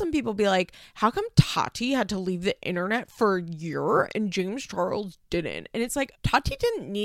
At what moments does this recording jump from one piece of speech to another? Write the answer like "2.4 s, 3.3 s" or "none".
6.1 s